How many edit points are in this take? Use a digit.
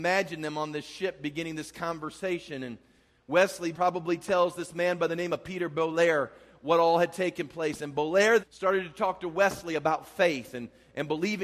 2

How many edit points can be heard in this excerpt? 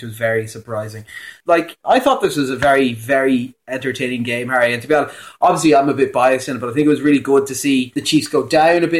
1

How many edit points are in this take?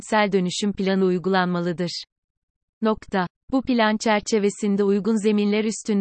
0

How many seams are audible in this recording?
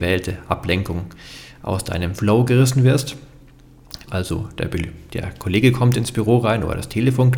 1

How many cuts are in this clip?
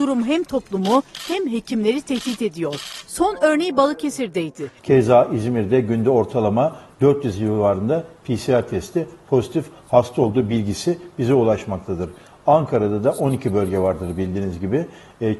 1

